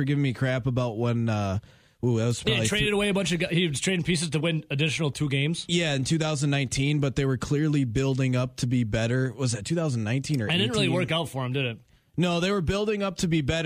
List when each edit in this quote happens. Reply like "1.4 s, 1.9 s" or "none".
none